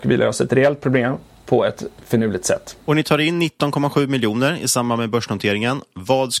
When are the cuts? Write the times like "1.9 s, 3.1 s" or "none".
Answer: none